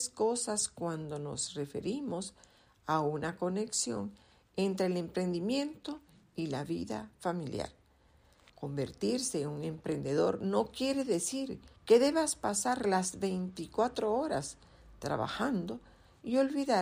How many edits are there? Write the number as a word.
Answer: two